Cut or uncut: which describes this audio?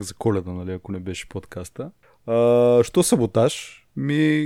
uncut